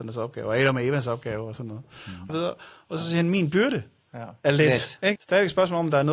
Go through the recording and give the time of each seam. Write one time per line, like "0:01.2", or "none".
0:02.3
0:05.2